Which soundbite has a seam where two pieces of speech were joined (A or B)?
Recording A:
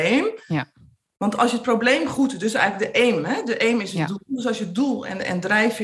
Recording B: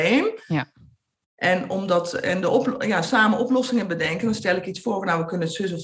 A